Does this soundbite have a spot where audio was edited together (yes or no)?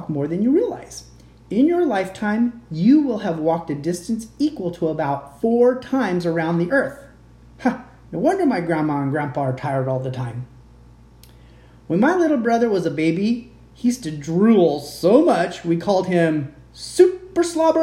no